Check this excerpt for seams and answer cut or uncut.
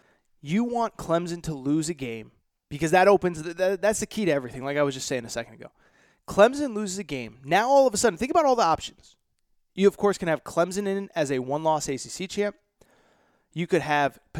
uncut